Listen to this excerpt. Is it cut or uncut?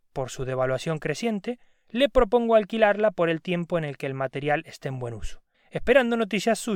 uncut